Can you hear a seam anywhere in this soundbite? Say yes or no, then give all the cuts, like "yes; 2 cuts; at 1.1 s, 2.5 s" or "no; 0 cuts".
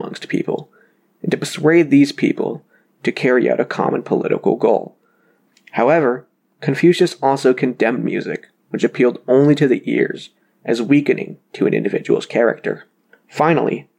no; 0 cuts